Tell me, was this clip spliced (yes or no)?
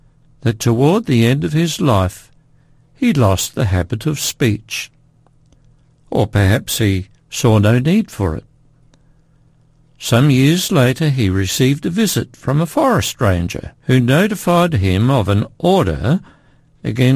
yes